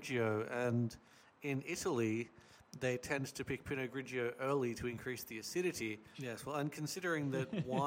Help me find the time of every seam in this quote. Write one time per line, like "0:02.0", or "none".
0:06.1